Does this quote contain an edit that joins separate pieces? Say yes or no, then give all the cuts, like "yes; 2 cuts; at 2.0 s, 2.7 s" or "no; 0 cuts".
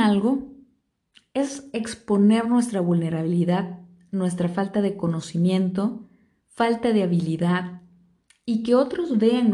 no; 0 cuts